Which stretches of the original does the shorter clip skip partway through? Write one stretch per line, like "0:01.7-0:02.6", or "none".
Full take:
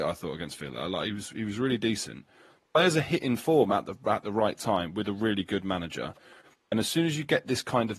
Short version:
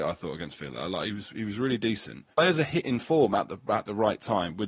0:02.3-0:02.7